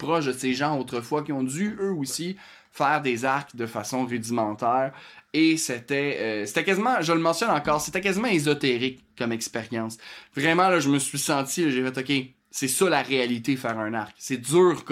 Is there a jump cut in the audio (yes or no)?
no